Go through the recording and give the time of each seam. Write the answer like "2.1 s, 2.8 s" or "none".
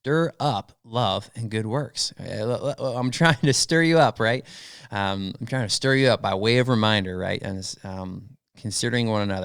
none